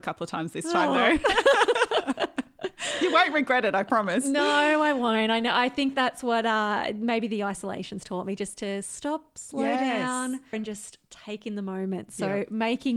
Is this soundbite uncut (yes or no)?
no